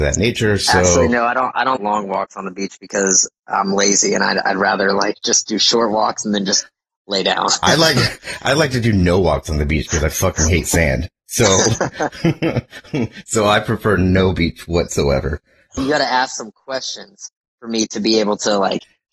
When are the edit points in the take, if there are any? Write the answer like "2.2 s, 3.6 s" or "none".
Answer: 1.8 s, 15.8 s